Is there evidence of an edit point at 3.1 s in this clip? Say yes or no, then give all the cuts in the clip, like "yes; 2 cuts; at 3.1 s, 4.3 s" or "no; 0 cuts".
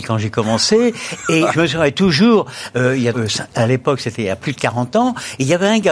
yes; 1 cut; at 3.1 s